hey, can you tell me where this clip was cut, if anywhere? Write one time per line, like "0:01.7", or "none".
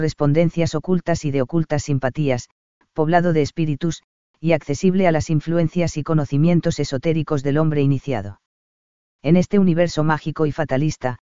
none